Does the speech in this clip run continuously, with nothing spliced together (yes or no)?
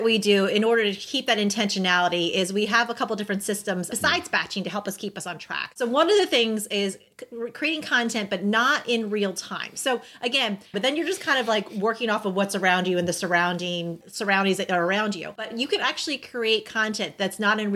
no